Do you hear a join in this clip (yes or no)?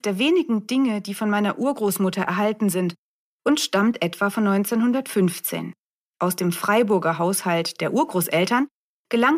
no